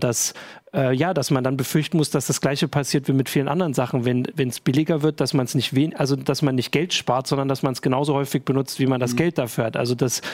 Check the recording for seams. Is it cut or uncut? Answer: uncut